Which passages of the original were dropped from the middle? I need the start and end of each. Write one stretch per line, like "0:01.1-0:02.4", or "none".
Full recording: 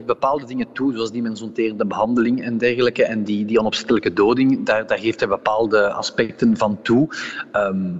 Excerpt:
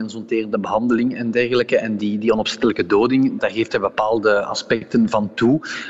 0:04.7-0:04.9